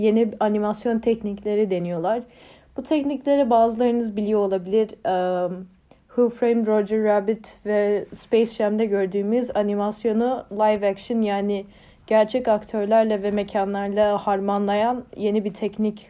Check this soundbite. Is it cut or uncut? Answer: uncut